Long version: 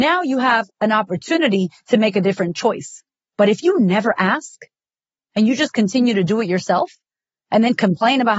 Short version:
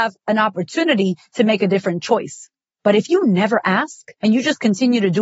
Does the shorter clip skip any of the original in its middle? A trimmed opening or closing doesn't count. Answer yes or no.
yes